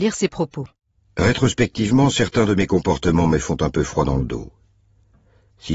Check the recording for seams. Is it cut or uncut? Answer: uncut